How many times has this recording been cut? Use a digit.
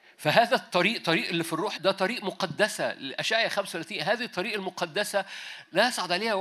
1